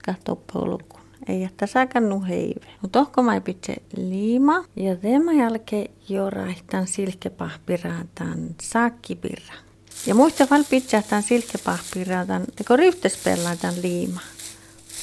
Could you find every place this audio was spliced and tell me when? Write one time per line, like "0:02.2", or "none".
0:02.7